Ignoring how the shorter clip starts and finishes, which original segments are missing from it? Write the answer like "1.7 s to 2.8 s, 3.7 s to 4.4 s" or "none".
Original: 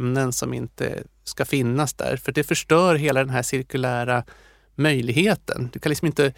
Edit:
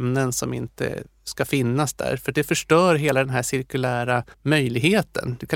4.3 s to 4.7 s